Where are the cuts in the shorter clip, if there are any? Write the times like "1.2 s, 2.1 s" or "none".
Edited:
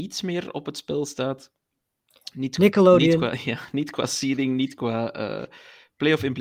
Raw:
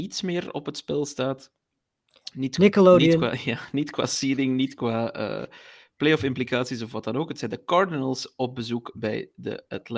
none